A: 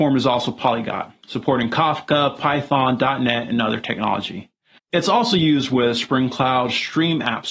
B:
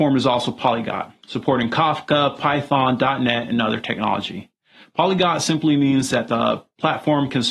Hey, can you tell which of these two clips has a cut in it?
A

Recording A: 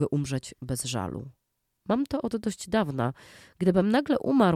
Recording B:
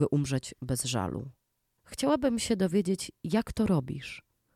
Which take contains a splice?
B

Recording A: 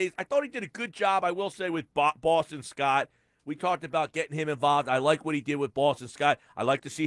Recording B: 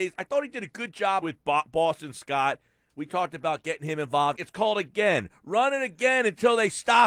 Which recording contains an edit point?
B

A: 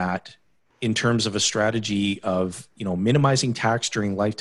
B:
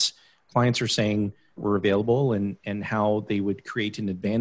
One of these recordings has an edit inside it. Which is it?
B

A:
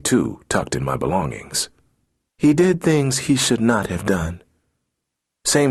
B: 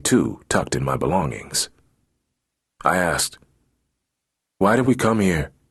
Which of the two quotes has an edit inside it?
A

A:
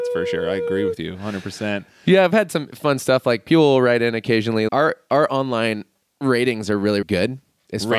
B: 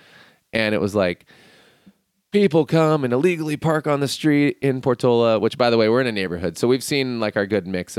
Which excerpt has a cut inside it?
A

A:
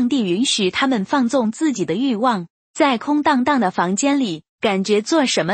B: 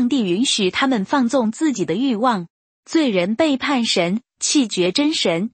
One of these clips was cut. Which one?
A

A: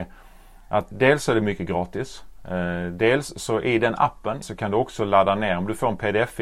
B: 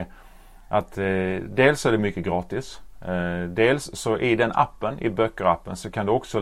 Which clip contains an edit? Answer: A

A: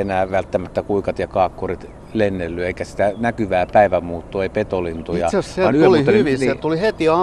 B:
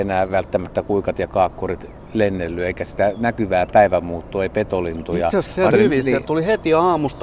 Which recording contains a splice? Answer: B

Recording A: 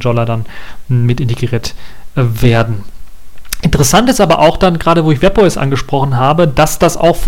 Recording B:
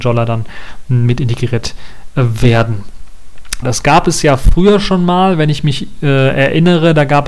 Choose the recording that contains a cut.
B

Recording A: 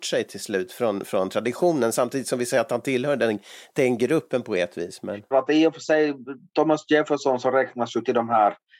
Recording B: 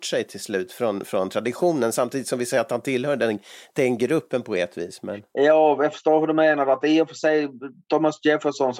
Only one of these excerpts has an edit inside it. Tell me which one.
A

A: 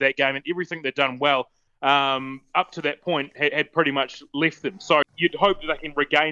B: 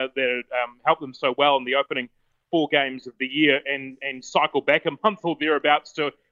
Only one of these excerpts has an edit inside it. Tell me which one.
A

